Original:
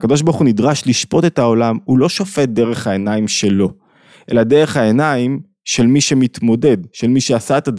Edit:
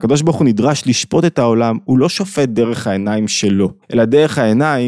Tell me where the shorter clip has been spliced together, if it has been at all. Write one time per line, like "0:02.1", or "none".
0:03.8